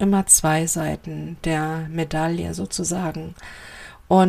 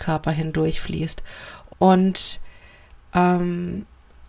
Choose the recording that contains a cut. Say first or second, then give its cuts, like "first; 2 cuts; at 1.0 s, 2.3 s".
second; 1 cut; at 1.7 s